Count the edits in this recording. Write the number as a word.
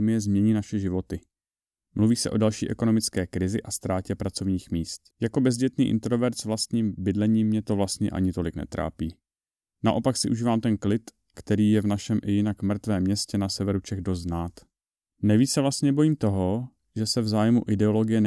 one